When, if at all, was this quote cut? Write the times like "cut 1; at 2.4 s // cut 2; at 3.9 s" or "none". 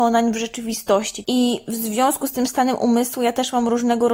cut 1; at 1.2 s